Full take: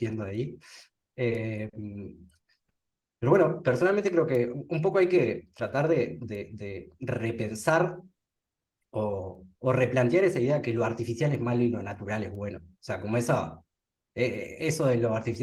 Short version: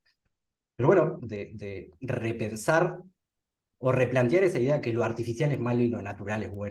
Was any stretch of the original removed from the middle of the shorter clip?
yes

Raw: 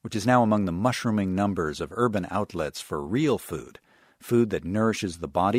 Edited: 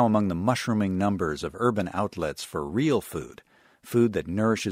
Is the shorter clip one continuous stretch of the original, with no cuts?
yes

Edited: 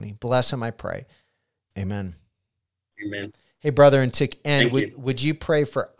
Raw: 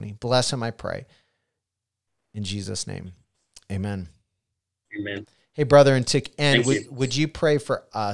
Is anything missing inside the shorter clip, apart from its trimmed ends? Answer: yes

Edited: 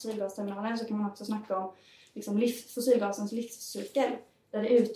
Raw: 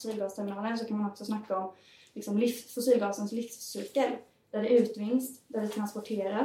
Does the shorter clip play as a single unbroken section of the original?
yes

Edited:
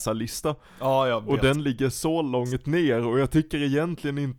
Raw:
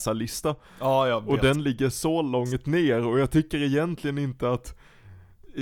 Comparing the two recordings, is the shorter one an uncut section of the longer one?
yes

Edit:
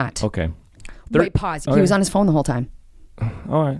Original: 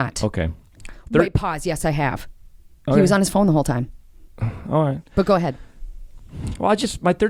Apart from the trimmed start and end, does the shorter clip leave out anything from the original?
yes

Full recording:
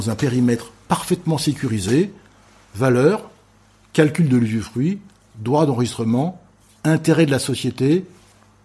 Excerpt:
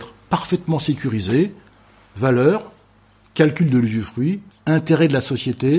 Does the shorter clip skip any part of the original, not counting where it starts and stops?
yes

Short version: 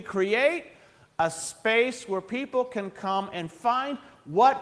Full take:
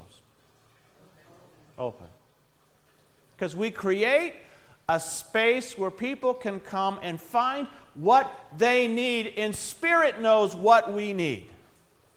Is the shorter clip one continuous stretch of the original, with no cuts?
yes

